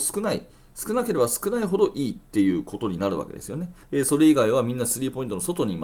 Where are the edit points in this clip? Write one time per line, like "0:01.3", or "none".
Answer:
0:03.8